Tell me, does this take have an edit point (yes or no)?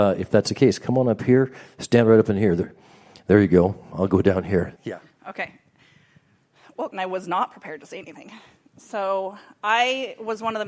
yes